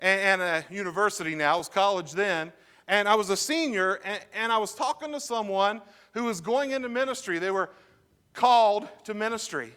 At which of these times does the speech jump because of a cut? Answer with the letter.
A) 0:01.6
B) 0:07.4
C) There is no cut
C